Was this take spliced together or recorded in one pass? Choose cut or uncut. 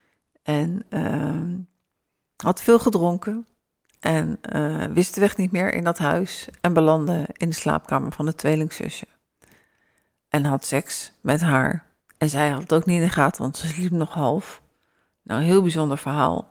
uncut